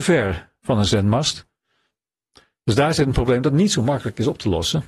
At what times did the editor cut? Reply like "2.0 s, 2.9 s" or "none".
none